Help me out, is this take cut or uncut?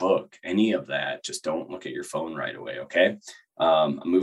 uncut